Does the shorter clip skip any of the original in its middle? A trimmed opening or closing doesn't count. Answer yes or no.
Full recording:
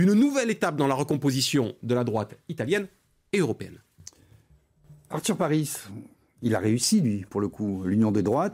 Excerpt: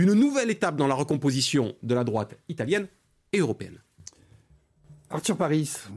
no